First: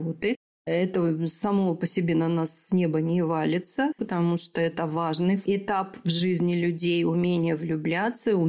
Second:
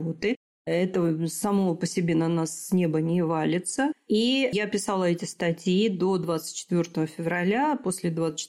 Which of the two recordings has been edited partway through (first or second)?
first